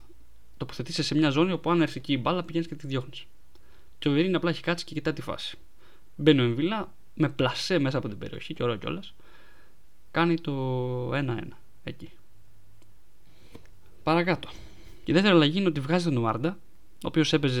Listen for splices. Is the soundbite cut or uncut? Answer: cut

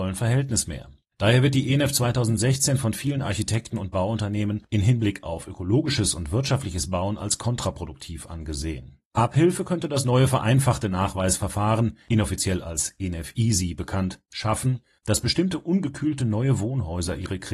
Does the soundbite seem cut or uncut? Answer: cut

